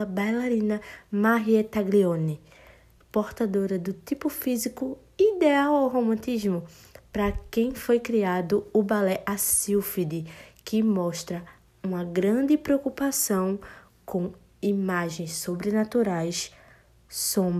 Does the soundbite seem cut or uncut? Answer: uncut